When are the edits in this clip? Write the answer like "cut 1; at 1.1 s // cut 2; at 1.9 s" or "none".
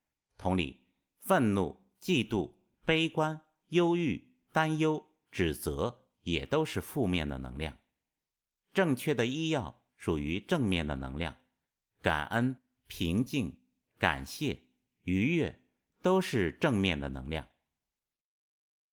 none